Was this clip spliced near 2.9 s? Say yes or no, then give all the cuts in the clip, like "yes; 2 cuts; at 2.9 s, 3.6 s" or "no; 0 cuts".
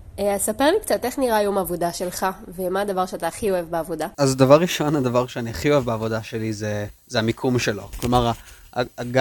no; 2 cuts; at 4.1 s, 7.0 s